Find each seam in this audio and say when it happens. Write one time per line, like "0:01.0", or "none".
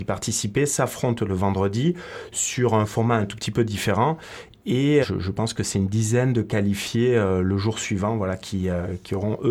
0:05.0